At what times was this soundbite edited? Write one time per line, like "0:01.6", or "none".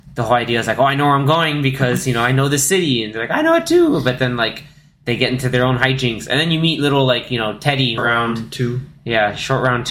0:08.0